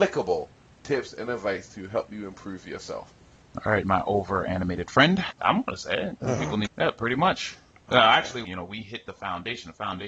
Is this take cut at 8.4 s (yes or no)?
yes